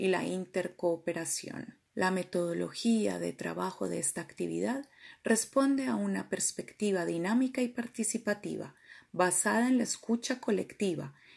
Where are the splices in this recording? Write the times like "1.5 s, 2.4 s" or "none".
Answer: 1.9 s